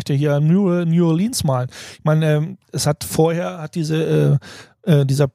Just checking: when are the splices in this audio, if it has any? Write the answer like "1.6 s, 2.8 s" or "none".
none